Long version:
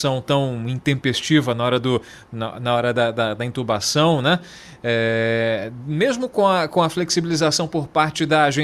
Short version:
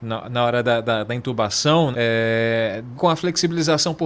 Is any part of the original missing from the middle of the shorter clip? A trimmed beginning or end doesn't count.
yes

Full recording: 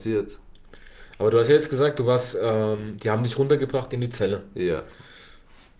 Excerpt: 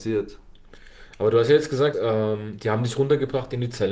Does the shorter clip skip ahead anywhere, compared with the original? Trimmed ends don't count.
yes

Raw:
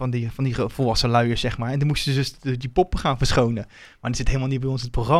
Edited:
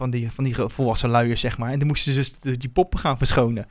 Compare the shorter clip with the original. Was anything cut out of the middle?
no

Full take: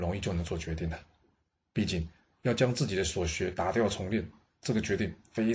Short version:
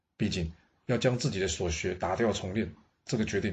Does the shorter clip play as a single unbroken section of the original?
yes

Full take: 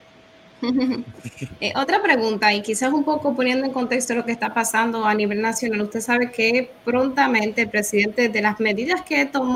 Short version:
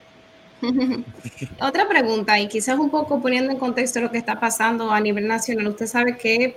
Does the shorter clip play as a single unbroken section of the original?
no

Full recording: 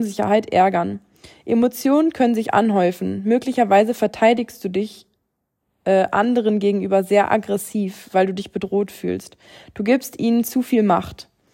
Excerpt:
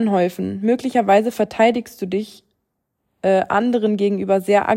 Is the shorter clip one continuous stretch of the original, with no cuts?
yes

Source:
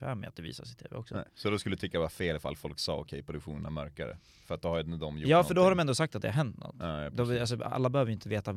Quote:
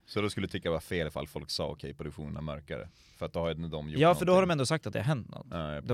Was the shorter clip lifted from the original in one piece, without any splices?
yes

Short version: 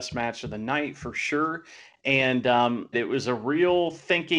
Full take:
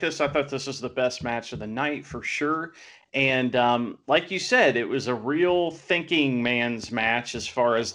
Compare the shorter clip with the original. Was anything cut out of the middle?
yes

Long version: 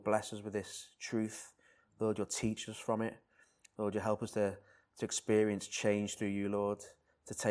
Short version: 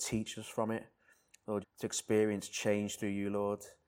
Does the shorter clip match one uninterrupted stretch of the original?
no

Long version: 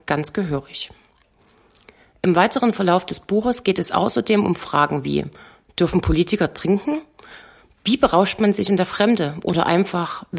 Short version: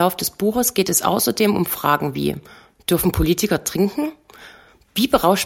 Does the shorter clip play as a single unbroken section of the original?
yes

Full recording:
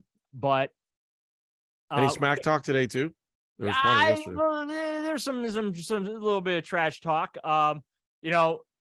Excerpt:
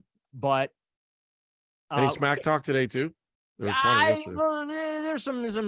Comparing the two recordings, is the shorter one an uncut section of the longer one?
yes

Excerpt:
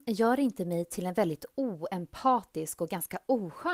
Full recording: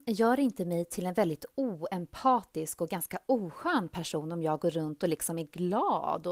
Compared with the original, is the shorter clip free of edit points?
yes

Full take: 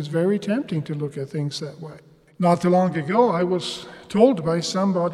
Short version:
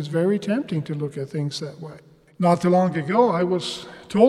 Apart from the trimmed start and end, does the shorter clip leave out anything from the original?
no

